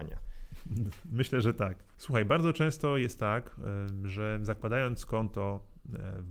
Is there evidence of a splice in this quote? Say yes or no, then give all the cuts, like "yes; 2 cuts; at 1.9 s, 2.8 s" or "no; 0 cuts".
no; 0 cuts